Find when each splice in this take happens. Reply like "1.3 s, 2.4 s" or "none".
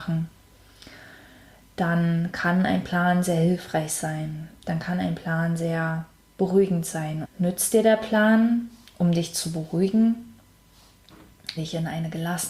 7.2 s, 11.6 s